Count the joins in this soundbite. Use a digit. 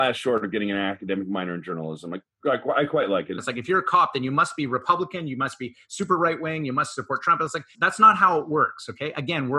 2